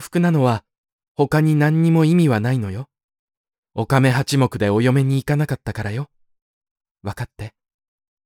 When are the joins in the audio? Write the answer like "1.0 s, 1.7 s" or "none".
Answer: 3.6 s